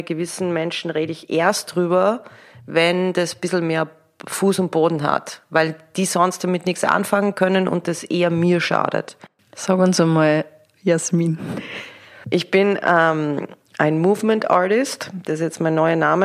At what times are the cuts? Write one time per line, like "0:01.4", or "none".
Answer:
0:10.7

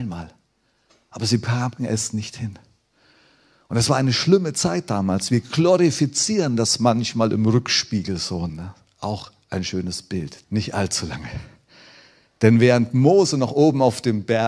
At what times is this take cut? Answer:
0:08.5
0:10.4

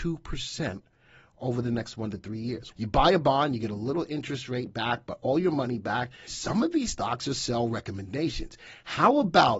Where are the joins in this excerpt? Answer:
0:02.7
0:06.3

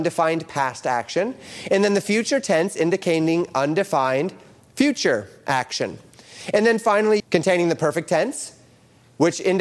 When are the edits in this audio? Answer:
0:07.2

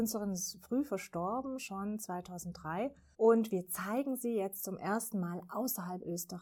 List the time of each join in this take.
0:03.1

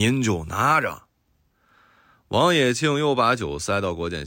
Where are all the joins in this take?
none

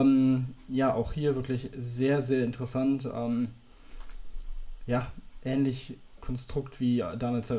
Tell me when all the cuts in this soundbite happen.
0:06.2

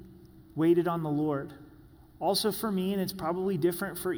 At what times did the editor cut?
none

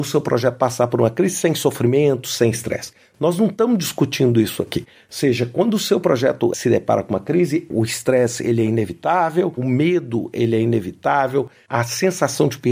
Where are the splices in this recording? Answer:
0:09.6

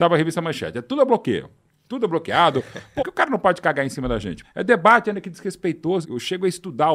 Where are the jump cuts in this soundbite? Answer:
0:03.0
0:04.4
0:06.0

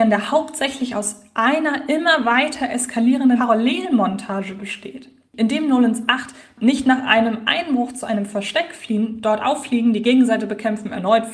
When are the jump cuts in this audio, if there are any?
0:05.3

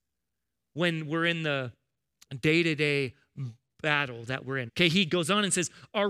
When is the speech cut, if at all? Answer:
0:04.7

